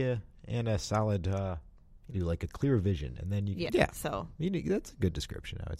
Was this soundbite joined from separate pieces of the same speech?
yes; 2 cuts; at 2.1 s, 3.7 s

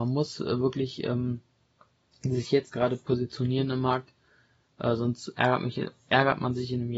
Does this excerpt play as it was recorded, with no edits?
yes; 0 cuts

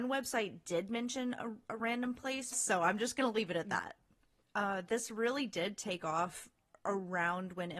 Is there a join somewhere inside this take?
yes; 2 cuts; at 2.5 s, 4.4 s

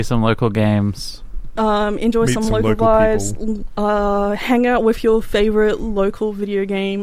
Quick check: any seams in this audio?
no; 0 cuts

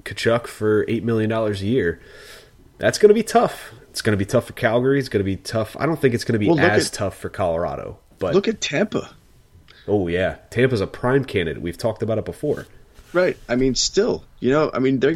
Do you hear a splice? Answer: no; 0 cuts

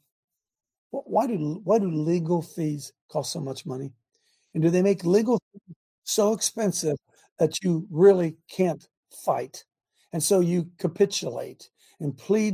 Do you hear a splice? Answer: no; 0 cuts

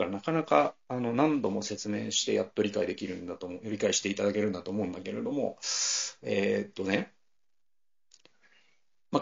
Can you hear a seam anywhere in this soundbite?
no; 0 cuts

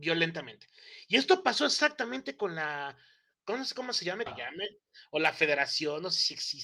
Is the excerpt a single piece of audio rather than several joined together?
no; 1 cut; at 4.3 s

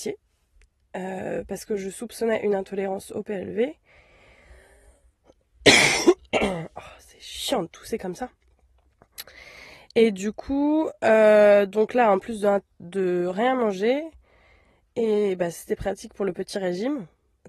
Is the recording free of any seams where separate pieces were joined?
yes; 0 cuts

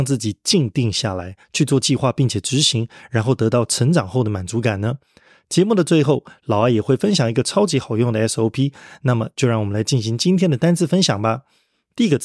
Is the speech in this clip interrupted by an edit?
no; 0 cuts

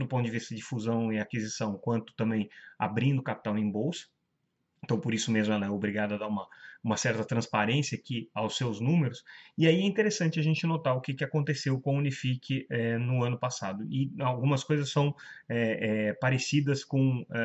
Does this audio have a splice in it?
no; 0 cuts

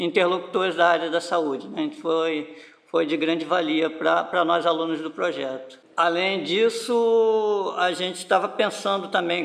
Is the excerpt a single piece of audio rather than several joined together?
yes; 0 cuts

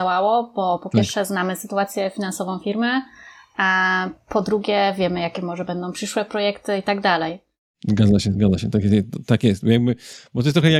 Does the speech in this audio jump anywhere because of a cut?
no; 0 cuts

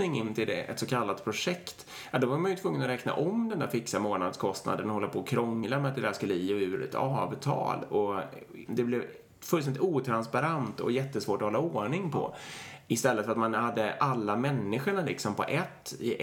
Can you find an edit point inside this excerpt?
yes; 1 cut; at 8.7 s

